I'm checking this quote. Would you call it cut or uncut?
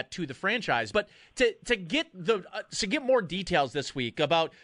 cut